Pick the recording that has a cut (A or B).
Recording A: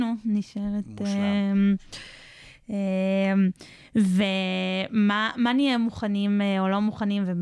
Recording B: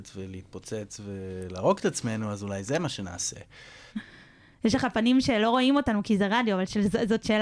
B